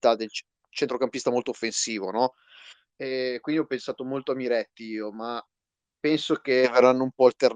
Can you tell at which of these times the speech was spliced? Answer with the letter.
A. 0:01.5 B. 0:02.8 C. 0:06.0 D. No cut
C